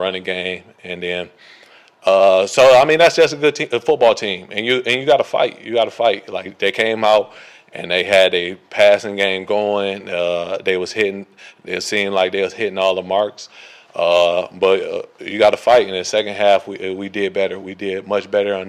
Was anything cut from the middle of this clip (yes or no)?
no